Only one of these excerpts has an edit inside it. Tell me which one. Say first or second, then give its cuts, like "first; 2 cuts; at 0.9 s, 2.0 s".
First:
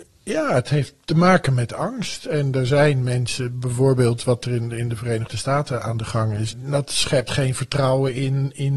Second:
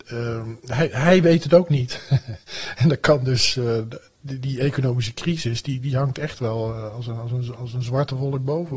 first; 1 cut; at 6.5 s